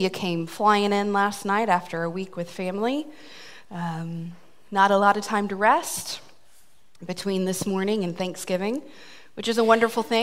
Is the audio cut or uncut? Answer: uncut